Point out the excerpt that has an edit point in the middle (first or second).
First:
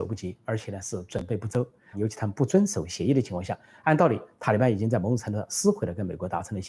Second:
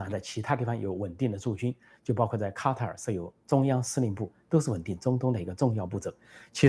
first